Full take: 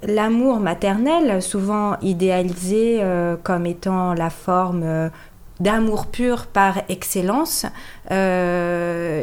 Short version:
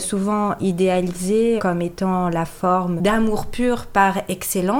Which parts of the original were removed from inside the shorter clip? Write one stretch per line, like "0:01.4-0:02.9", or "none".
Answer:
0:03.0-0:03.4
0:04.8-0:05.6